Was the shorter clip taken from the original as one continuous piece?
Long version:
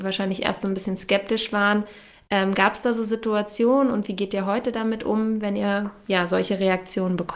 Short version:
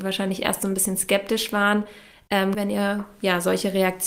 no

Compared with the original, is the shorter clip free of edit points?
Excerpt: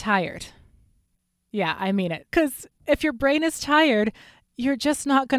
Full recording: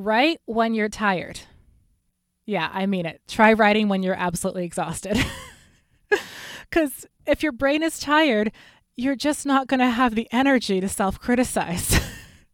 no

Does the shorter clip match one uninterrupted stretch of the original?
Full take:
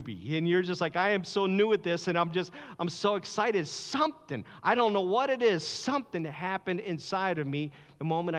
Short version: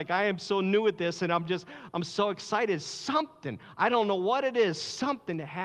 yes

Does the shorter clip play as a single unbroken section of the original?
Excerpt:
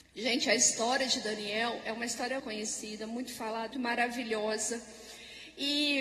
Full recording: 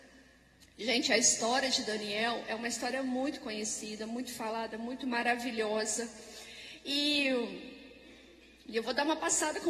no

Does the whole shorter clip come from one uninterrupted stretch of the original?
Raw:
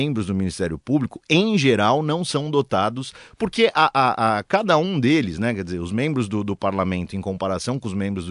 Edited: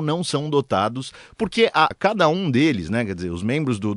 no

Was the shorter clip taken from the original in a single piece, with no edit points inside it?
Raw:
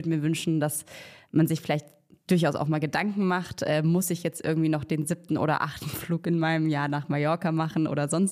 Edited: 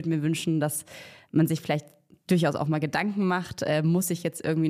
yes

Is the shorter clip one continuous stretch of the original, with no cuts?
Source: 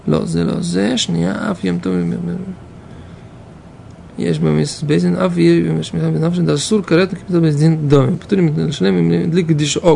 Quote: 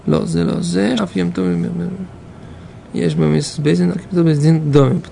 no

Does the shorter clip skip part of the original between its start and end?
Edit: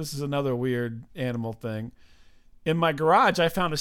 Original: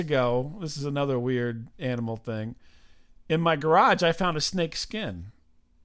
no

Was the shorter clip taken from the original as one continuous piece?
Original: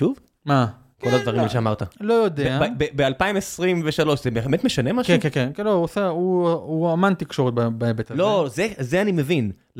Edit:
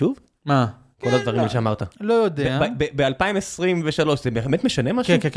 yes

